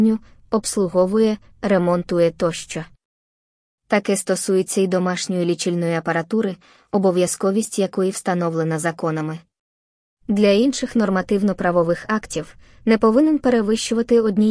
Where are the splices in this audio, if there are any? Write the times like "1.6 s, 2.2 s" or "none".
10.2 s